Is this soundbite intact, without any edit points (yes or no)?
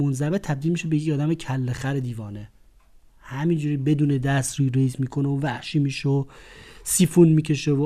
yes